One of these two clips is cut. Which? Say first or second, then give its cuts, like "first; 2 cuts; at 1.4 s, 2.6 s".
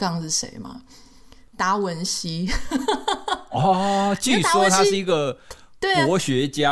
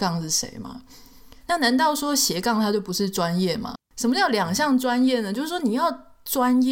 second; 2 cuts; at 1.4 s, 3.7 s